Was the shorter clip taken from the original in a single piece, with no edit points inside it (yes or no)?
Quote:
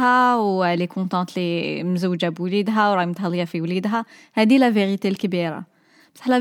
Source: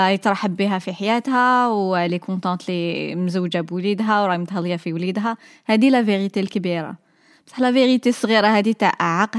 yes